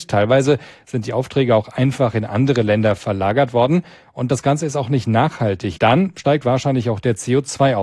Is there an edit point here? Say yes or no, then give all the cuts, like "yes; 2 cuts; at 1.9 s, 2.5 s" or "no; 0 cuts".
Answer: yes; 1 cut; at 5.8 s